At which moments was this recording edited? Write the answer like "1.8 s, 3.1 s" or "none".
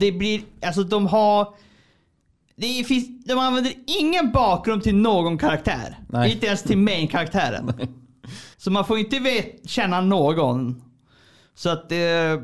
8.5 s